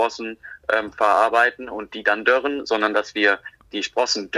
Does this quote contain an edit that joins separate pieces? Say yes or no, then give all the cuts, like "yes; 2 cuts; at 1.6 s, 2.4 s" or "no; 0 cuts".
no; 0 cuts